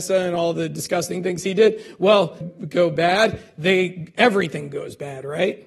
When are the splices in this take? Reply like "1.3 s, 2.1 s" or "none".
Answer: 2.4 s